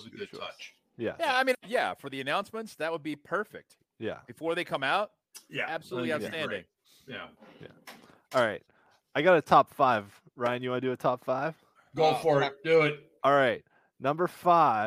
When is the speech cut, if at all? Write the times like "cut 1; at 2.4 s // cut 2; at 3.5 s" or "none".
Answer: cut 1; at 1.5 s // cut 2; at 13.2 s